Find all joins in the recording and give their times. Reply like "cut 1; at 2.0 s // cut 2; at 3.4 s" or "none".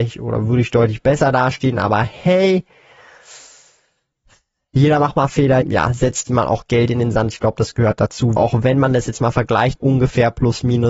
cut 1; at 5.6 s // cut 2; at 8.4 s // cut 3; at 9.8 s